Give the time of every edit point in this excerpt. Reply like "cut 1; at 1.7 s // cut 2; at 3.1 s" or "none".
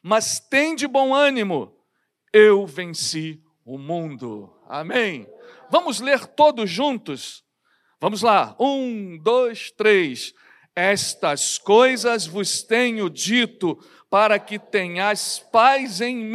none